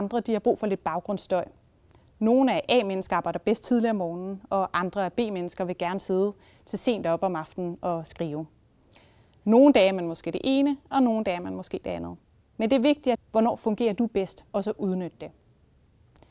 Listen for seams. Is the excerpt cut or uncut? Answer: cut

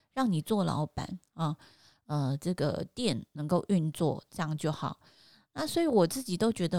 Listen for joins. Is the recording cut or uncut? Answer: cut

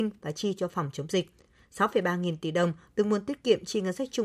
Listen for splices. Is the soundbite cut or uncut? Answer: uncut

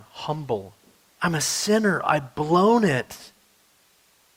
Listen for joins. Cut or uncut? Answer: cut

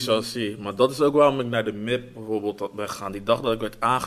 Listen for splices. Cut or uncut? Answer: uncut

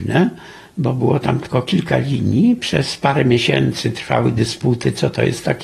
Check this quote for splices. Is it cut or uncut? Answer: uncut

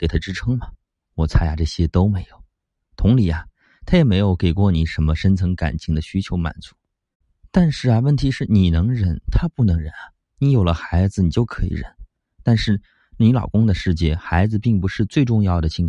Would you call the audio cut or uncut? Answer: uncut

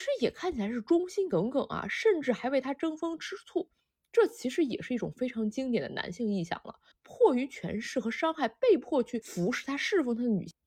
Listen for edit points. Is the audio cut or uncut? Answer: uncut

